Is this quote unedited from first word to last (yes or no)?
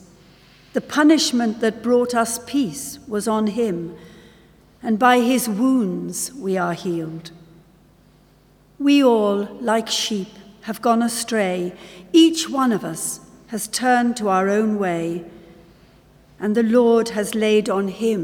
yes